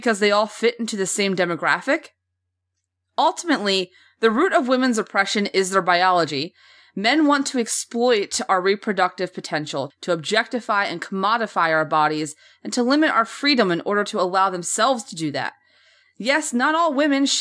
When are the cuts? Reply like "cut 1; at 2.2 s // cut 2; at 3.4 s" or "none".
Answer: cut 1; at 9.9 s // cut 2; at 16.0 s